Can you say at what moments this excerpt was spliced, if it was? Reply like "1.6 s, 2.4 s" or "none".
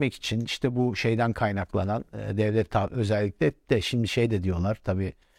none